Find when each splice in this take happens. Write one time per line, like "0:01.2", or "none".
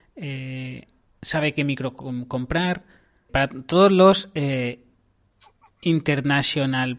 0:03.3